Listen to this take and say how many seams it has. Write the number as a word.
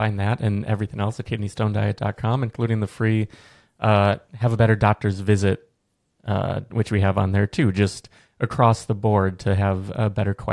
one